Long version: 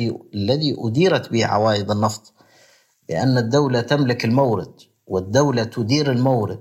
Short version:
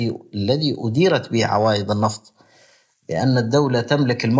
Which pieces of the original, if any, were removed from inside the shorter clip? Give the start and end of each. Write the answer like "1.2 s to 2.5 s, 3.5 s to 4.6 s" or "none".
none